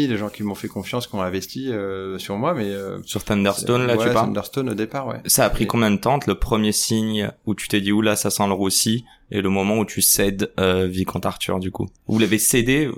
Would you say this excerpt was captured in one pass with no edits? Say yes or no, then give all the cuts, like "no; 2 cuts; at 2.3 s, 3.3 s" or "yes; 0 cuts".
no; 1 cut; at 12.0 s